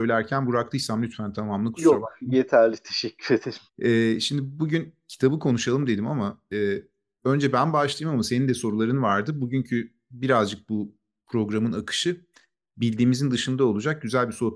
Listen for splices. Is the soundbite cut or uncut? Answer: cut